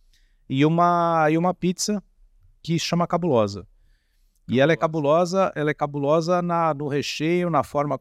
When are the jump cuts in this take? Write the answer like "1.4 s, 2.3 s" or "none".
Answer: none